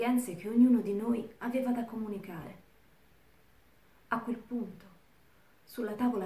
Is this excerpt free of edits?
yes; 0 cuts

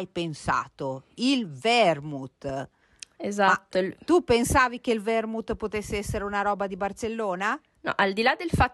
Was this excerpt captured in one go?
yes; 0 cuts

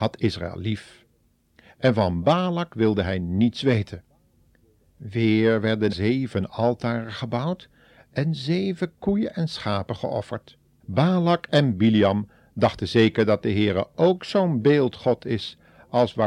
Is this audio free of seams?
no; 2 cuts; at 5.9 s, 10.8 s

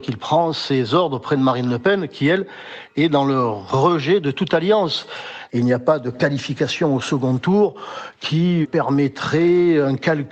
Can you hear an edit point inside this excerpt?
yes; 2 cuts; at 5.5 s, 8.6 s

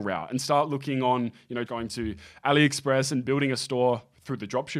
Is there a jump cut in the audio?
yes; 1 cut; at 1.7 s

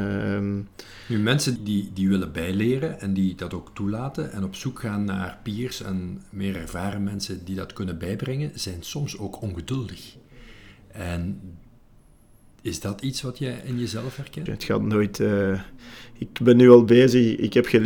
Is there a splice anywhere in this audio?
yes; 2 cuts; at 1.6 s, 14.5 s

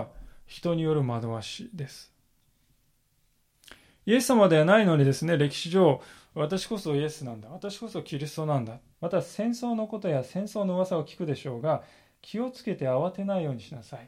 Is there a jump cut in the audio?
yes; 1 cut; at 8.9 s

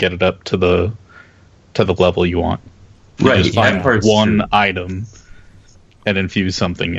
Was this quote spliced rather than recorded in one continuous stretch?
no; 0 cuts

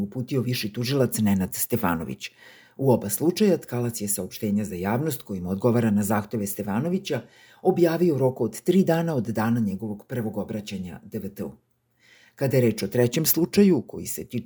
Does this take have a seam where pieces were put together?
no; 0 cuts

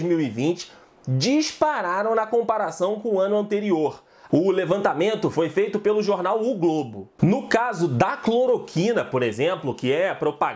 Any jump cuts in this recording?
yes; 1 cut; at 4.3 s

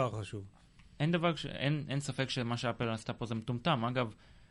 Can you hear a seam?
no; 0 cuts

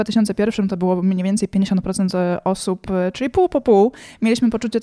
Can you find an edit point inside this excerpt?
no; 0 cuts

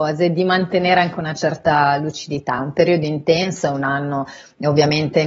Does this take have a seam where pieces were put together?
no; 0 cuts

